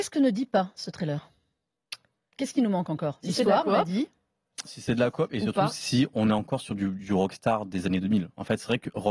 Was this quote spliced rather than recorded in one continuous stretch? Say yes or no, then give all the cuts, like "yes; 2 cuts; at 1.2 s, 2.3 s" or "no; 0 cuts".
no; 0 cuts